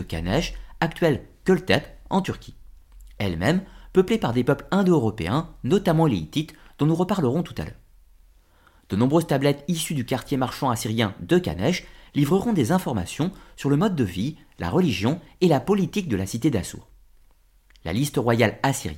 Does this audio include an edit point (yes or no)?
no